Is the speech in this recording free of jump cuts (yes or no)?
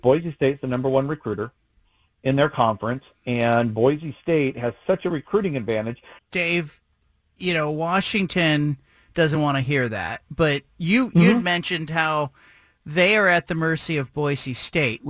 no